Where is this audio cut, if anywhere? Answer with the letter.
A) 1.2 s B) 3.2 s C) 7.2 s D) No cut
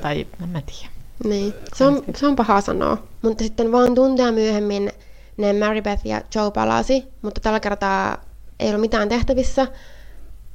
B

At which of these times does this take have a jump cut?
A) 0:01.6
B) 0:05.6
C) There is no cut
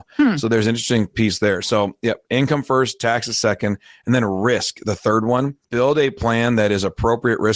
B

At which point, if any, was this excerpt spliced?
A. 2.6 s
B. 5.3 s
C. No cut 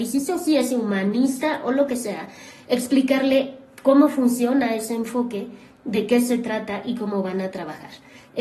C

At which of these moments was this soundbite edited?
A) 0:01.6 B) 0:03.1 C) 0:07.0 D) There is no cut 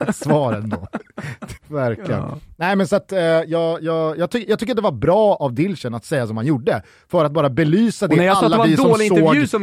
A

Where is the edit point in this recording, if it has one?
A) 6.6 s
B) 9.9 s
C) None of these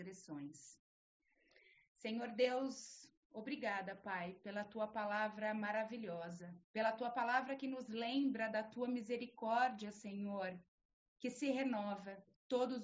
A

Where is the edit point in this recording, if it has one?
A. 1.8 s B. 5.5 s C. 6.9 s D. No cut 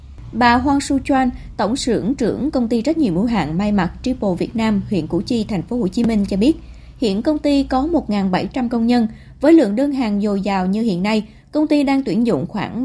D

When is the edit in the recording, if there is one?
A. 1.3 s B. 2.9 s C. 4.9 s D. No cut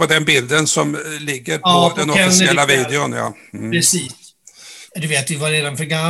C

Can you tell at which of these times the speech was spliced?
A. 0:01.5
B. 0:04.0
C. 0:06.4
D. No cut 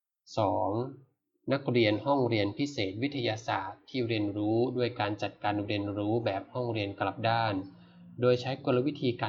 D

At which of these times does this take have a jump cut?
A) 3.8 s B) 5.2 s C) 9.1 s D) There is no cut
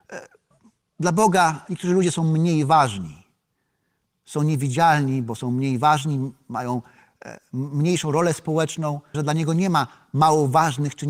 C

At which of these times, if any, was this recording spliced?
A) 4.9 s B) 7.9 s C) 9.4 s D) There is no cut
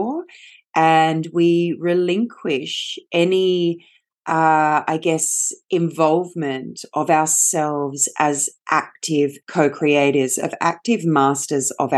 C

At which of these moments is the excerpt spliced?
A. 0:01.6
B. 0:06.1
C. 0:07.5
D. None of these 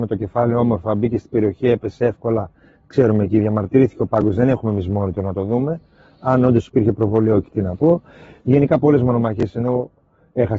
C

